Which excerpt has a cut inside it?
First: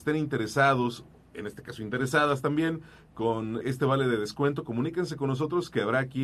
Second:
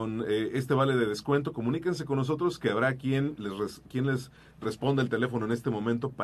first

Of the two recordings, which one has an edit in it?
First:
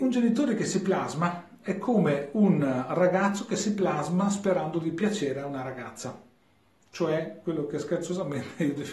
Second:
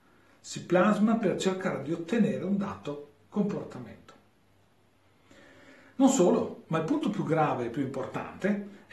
second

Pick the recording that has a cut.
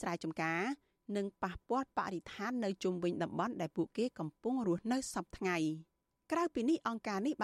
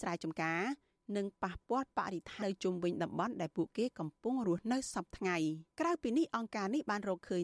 second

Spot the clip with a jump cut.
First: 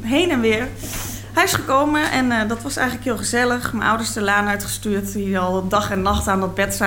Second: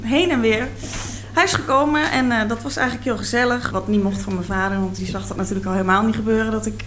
second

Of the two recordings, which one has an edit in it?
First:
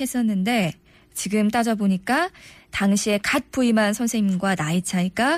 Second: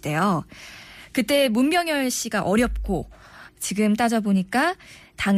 second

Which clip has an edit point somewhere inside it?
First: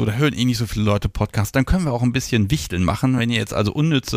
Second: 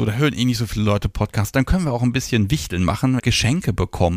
second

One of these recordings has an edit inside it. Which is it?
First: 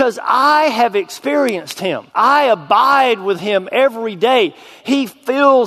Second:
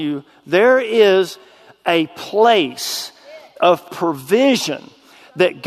first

